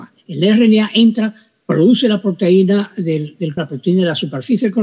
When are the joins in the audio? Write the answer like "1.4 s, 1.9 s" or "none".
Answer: 3.6 s